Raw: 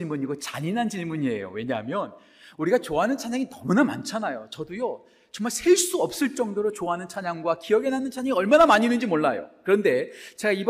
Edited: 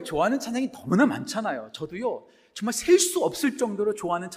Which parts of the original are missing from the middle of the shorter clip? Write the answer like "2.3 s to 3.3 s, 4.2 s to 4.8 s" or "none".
none